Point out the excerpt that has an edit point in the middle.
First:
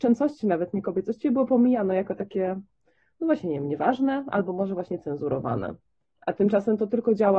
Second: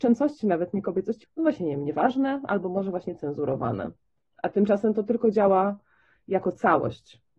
second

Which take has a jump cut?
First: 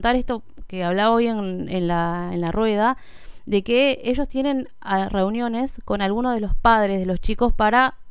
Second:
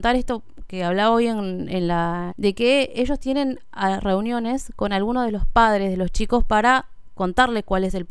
second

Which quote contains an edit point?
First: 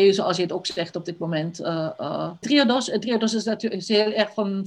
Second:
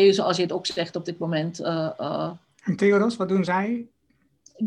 first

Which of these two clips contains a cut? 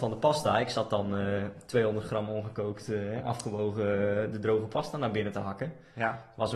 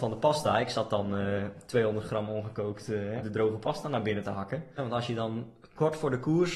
second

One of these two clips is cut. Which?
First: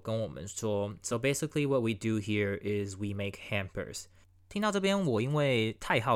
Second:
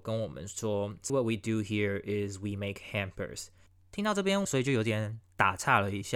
second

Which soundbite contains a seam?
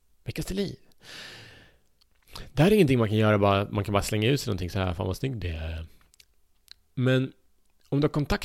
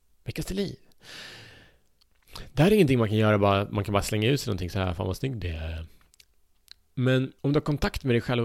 second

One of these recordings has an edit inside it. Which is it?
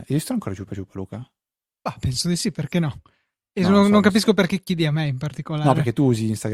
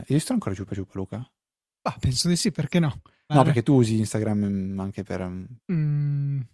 second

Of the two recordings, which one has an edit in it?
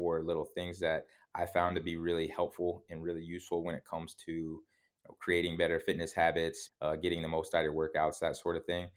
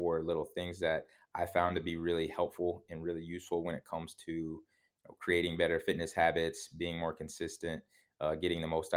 first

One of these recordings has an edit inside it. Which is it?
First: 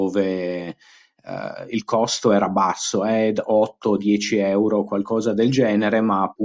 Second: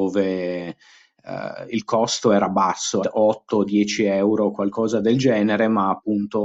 second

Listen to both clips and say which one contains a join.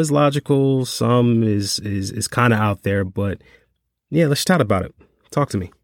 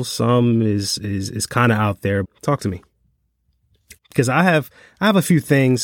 second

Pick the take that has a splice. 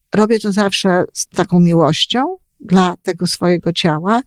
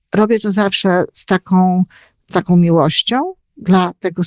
first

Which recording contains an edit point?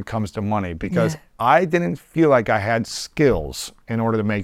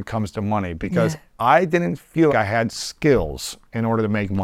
second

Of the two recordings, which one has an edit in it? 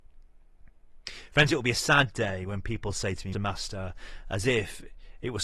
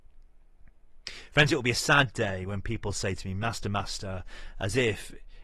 first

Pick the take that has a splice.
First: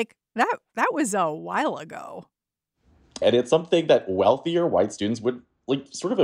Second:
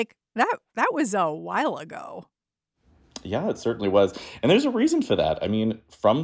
first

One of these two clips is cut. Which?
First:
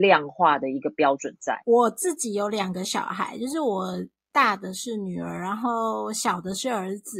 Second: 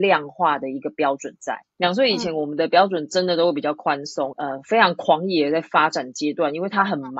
second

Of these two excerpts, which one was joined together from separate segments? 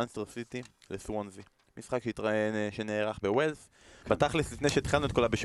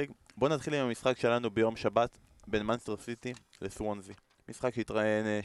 first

